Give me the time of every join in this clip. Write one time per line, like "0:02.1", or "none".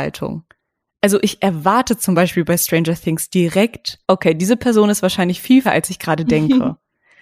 0:04.0
0:05.6